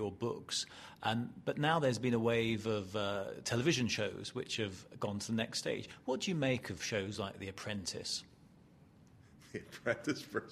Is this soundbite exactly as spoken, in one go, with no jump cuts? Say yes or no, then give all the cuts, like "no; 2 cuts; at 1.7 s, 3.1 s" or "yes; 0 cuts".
yes; 0 cuts